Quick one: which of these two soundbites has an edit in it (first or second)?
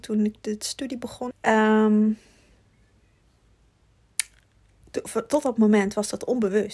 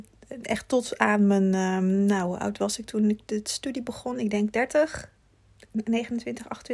first